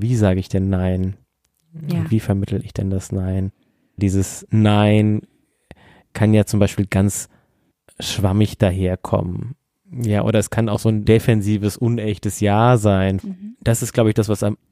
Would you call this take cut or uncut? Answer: uncut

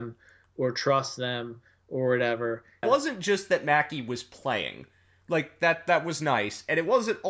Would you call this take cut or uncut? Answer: cut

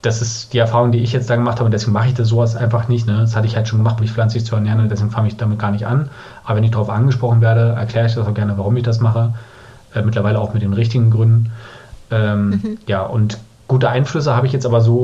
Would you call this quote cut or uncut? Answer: cut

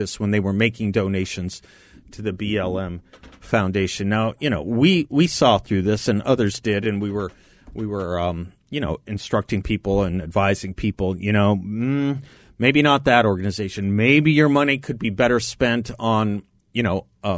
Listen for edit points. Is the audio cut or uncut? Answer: uncut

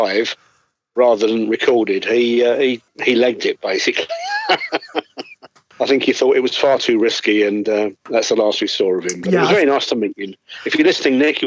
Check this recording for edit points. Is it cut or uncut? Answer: uncut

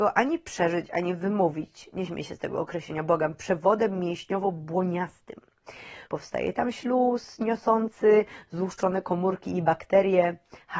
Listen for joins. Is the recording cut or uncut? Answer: cut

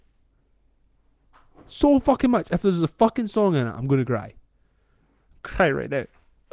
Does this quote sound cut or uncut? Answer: uncut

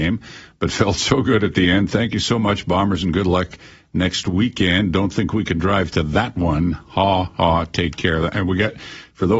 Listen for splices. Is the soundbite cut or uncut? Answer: uncut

